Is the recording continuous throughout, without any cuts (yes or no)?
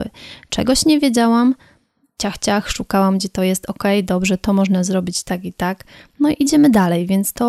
yes